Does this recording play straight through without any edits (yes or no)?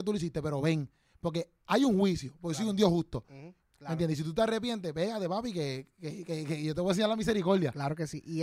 no